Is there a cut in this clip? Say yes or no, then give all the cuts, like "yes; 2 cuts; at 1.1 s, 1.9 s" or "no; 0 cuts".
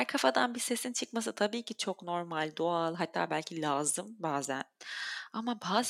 no; 0 cuts